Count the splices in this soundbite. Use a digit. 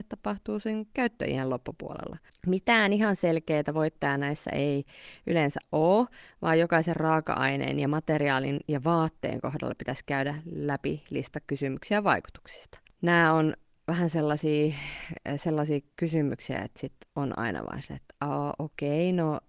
2